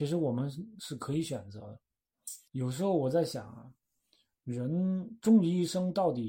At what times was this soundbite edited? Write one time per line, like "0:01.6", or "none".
0:02.5